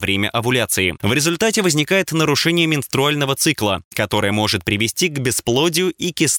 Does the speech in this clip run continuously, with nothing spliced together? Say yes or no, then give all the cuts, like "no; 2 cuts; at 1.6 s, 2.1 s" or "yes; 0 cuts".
yes; 0 cuts